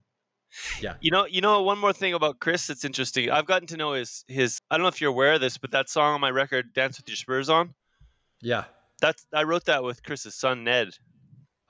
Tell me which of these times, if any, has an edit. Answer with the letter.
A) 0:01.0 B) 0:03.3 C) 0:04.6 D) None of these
C